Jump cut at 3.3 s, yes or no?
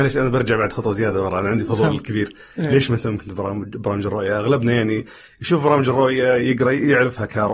no